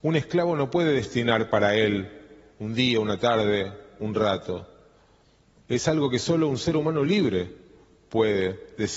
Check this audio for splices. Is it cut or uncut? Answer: uncut